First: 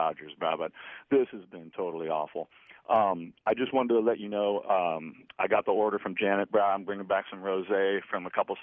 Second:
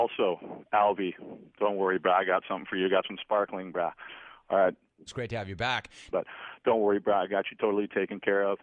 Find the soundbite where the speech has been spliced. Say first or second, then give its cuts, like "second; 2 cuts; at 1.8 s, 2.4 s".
second; 2 cuts; at 5.1 s, 6.1 s